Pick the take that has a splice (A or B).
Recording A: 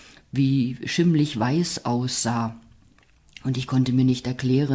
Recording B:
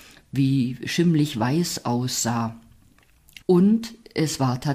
B